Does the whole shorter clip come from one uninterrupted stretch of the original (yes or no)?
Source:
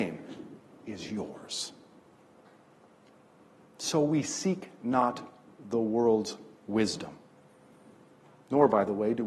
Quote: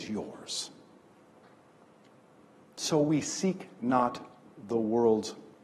yes